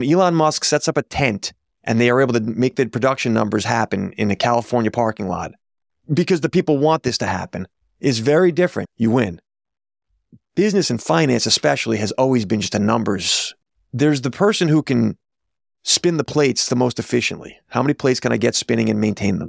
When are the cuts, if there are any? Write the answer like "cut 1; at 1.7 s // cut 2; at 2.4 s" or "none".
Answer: cut 1; at 8.8 s